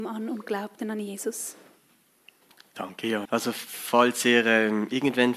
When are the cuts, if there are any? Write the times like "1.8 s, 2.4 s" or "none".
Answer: 3.3 s